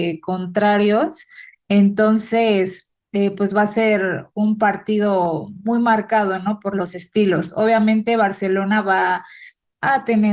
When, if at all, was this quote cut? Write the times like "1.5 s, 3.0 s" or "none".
none